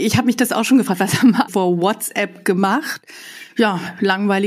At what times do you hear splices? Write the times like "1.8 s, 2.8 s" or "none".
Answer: 1.5 s